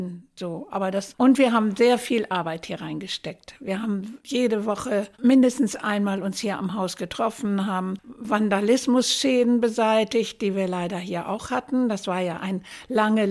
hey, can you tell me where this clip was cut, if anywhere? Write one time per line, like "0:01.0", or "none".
0:05.1